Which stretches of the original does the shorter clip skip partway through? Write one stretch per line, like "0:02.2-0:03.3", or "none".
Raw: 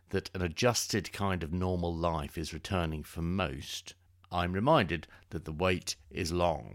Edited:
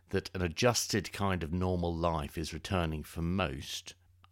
none